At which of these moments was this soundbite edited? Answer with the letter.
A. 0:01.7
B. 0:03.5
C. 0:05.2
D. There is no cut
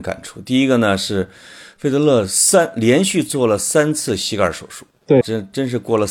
C